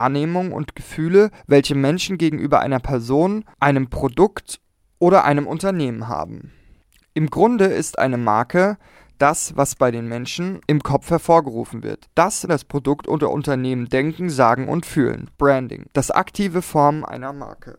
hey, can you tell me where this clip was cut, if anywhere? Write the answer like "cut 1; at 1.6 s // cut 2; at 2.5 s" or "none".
cut 1; at 12.5 s // cut 2; at 15.3 s